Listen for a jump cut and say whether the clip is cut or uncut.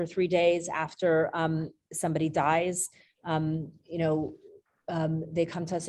uncut